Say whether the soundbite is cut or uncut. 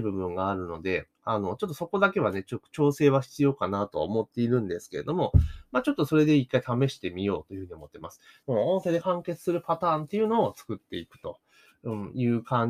cut